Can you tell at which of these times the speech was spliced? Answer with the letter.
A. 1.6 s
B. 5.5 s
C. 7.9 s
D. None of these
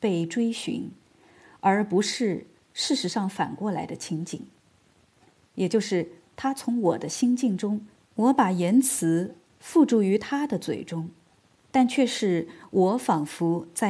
C